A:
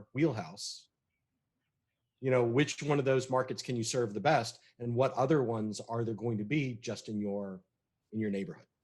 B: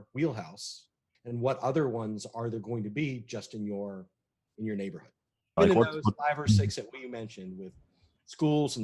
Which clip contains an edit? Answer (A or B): B